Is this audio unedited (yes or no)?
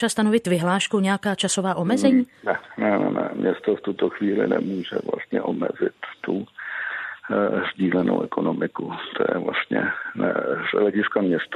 yes